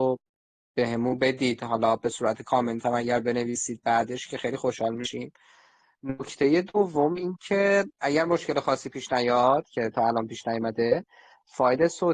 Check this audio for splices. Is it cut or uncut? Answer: uncut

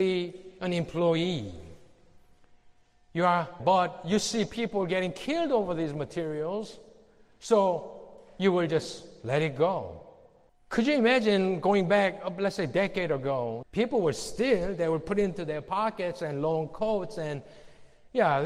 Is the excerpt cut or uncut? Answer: cut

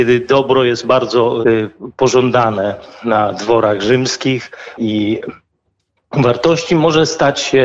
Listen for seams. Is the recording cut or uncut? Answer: cut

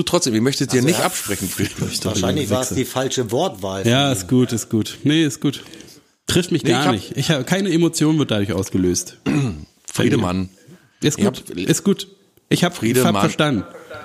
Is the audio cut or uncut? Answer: uncut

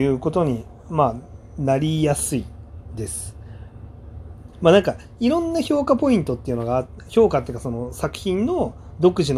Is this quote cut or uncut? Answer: cut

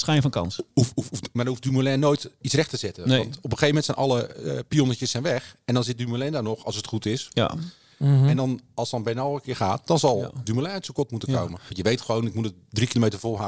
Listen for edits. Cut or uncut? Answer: cut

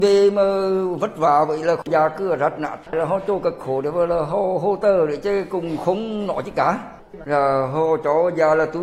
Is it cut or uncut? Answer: uncut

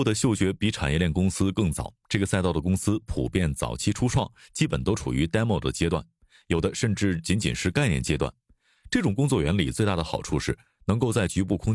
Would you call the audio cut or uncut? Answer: cut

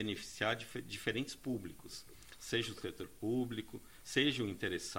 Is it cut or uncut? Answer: cut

